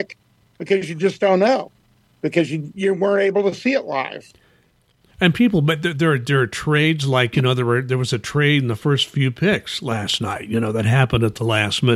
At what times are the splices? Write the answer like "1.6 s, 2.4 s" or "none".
none